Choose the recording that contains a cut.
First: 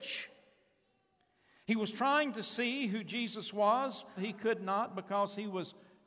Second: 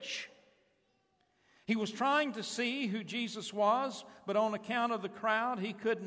first; 1 cut; at 4.2 s

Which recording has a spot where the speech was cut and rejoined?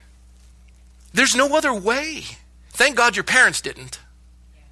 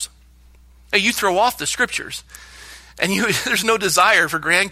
first; 1 cut; at 2.7 s

